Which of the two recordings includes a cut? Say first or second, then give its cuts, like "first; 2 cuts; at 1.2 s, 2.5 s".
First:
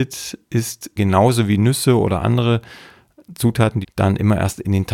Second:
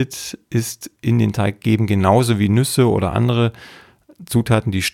first; 2 cuts; at 1.0 s, 3.8 s